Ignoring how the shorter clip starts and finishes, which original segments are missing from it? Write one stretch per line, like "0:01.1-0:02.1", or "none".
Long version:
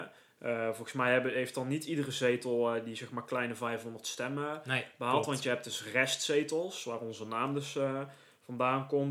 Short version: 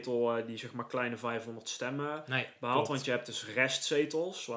none